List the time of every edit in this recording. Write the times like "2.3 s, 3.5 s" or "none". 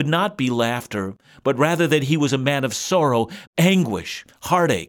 3.4 s